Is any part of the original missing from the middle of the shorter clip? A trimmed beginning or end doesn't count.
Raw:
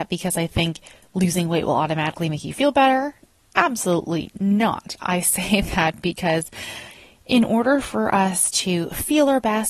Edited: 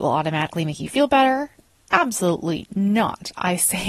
no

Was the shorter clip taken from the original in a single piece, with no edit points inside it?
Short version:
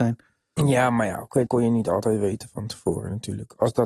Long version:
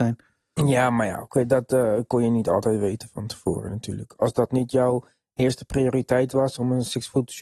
no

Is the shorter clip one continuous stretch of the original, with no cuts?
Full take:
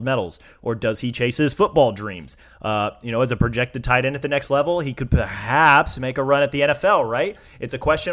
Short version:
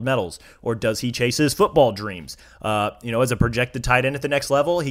yes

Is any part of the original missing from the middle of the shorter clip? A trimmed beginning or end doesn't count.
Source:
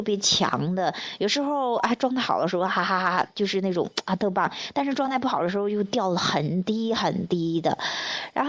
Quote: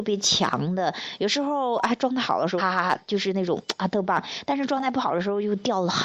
yes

